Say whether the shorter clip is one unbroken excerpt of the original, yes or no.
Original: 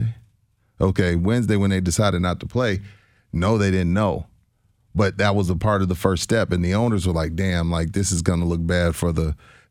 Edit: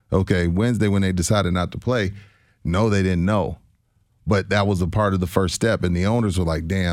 yes